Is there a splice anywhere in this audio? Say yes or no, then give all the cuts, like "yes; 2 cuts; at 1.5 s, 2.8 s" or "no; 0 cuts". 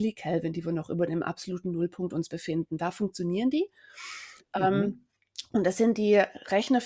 no; 0 cuts